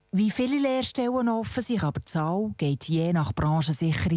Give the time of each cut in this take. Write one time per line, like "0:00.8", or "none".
0:01.8